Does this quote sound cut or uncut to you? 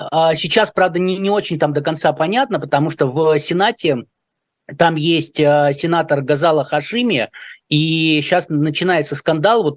uncut